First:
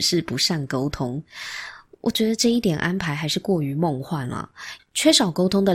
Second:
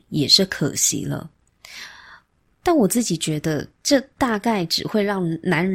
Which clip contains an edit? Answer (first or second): first